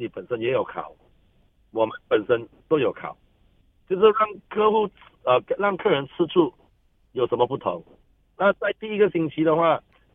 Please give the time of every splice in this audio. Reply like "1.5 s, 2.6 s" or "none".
none